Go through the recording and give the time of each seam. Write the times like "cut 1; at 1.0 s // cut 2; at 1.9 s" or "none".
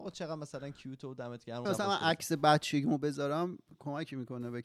cut 1; at 1.7 s